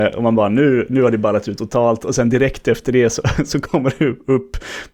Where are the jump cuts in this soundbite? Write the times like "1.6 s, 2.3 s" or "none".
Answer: none